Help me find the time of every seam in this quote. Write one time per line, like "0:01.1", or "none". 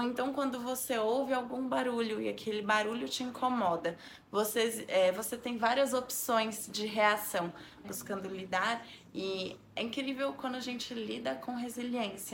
0:07.8